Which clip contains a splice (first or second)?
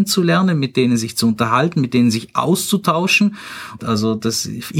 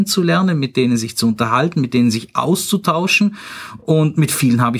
first